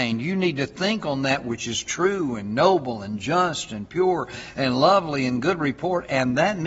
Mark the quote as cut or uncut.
uncut